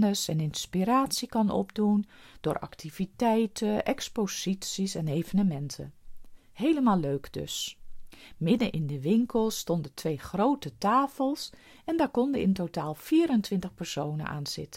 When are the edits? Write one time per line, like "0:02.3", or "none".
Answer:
none

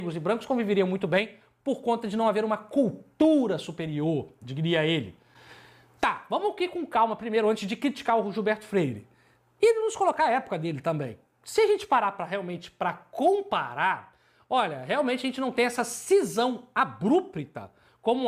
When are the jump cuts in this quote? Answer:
none

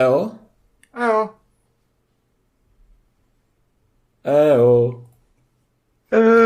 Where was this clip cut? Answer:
none

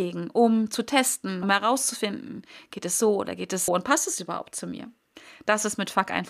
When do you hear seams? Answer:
0:01.4
0:03.7

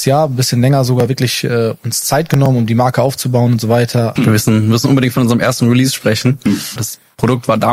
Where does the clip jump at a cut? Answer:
0:04.2
0:06.8

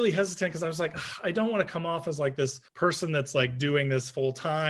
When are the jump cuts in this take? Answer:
0:02.7

